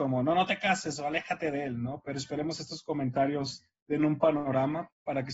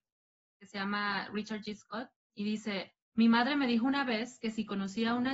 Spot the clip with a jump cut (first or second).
second